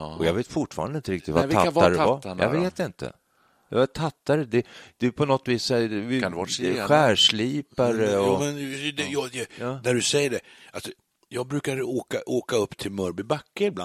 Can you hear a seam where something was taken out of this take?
yes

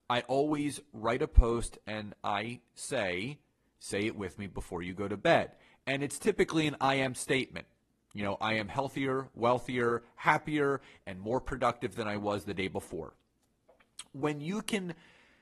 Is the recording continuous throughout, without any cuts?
yes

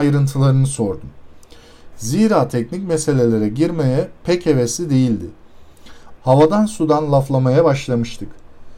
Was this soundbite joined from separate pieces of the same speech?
yes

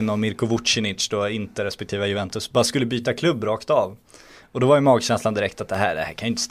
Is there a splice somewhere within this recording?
no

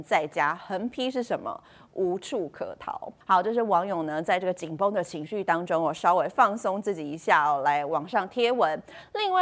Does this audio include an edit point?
yes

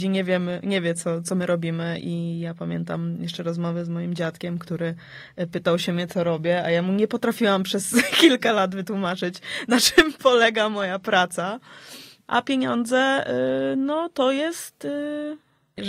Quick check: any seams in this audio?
no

